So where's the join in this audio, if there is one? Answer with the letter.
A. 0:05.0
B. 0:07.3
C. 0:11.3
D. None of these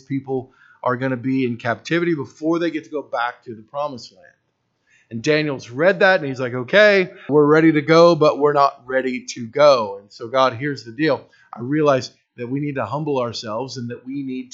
B